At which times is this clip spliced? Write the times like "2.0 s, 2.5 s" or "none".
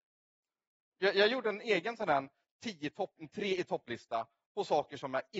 0.9 s, 3.2 s